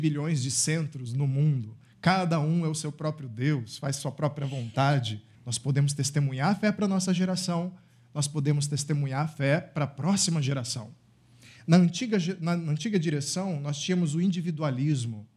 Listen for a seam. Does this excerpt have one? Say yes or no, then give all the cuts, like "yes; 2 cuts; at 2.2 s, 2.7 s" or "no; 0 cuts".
yes; 1 cut; at 5.4 s